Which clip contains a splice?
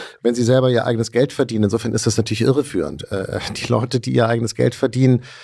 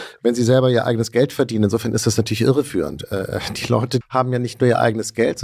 second; 1 cut; at 4.0 s

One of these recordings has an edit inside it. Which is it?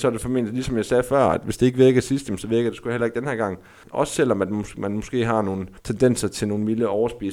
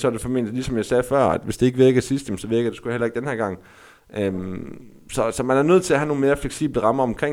first; 2 cuts; at 3.8 s, 5.8 s

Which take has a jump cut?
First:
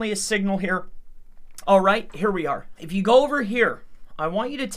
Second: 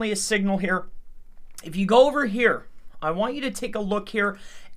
first; 2 cuts; at 1.6 s, 2.8 s

